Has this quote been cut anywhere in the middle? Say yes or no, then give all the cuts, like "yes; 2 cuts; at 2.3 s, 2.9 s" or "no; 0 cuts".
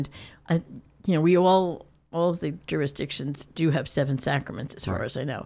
yes; 1 cut; at 2.0 s